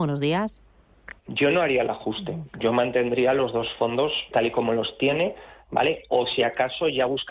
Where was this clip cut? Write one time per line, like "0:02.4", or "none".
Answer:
0:01.2
0:04.3

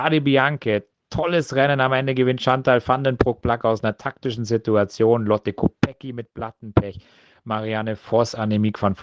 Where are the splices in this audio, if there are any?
none

